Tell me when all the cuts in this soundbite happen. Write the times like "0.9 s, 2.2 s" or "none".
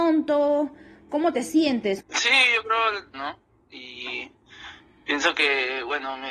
2.0 s, 3.1 s